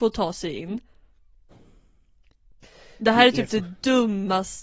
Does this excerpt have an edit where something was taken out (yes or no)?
no